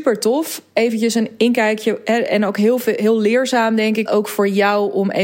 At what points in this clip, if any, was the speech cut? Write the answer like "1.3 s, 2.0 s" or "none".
4.1 s